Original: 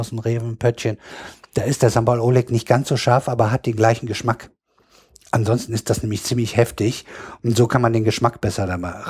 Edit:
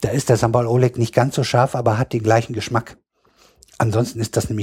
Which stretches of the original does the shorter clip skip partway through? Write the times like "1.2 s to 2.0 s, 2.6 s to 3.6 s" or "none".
none